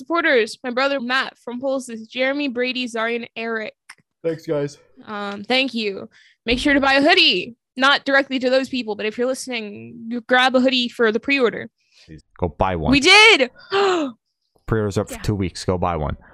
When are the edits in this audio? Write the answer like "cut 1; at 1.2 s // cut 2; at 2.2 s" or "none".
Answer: cut 1; at 1.0 s // cut 2; at 4.2 s // cut 3; at 12.2 s